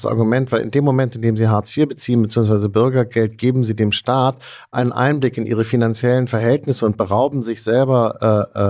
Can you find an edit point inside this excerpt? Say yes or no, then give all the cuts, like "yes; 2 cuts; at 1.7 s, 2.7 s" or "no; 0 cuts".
no; 0 cuts